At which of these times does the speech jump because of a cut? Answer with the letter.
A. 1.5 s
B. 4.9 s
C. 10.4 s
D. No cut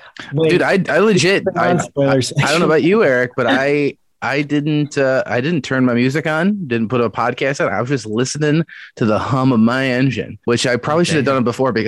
C